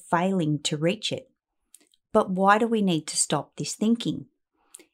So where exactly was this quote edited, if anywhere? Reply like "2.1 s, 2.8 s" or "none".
none